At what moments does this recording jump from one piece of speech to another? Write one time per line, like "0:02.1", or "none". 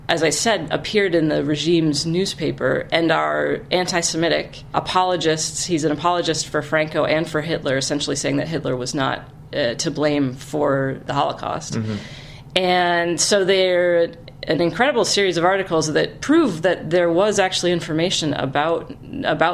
none